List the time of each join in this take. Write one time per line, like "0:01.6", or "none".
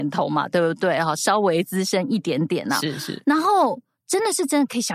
none